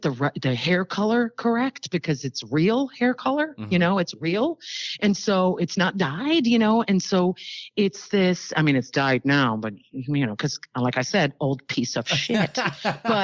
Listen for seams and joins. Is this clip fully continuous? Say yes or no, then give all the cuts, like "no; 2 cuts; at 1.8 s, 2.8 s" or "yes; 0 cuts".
yes; 0 cuts